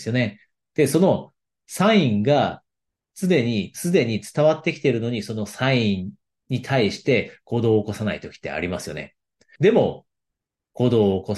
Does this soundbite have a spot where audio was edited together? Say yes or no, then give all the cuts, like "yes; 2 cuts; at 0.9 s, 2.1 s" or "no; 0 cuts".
yes; 1 cut; at 9.6 s